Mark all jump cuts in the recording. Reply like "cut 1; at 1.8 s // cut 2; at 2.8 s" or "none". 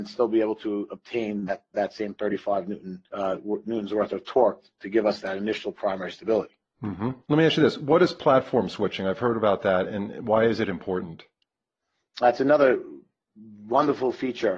cut 1; at 3.1 s // cut 2; at 7.2 s